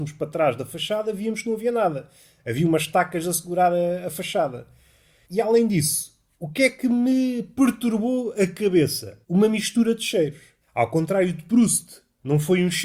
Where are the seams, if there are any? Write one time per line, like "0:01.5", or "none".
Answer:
0:09.2
0:10.6